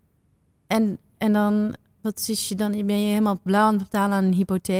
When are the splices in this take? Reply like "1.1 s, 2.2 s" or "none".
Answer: none